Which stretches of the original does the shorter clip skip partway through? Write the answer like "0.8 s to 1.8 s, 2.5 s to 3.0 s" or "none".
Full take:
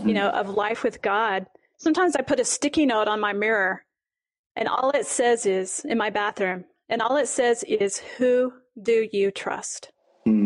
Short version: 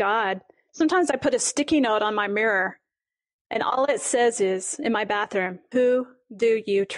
6.8 s to 8.2 s